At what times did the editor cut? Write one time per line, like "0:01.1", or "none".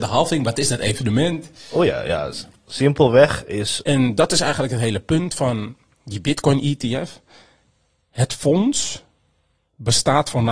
0:03.8